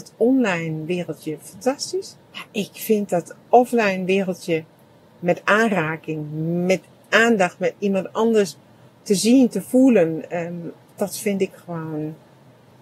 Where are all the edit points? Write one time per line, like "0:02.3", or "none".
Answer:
0:02.2
0:10.9